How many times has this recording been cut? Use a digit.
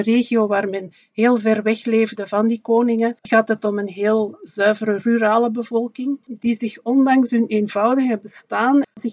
0